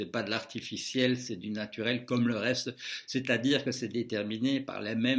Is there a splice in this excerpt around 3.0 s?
no; 0 cuts

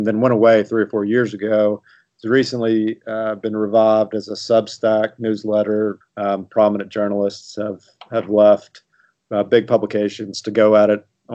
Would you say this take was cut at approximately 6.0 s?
yes; 1 cut; at 6.0 s

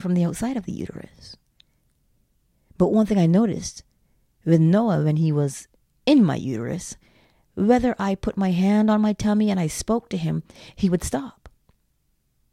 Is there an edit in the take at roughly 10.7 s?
yes; 1 cut; at 10.7 s

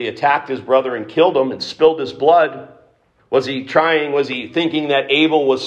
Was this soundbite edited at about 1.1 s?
no; 1 cut; at 3.2 s

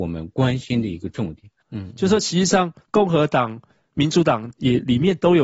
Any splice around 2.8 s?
yes; 2 cuts; at 1.6 s, 2.8 s

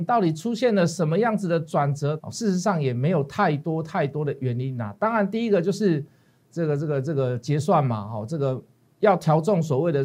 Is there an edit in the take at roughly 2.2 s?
yes; 1 cut; at 2.2 s

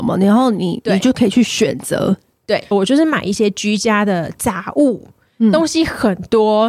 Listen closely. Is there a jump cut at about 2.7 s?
yes; 1 cut; at 2.7 s

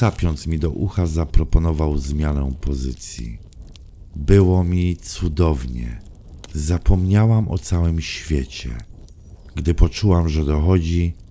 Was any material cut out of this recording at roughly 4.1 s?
yes; 1 cut; at 4.1 s

